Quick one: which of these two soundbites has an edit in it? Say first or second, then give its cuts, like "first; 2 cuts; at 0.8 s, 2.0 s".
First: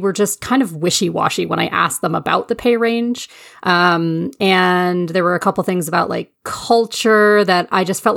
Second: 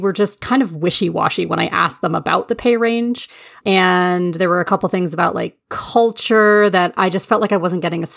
second; 1 cut; at 3.6 s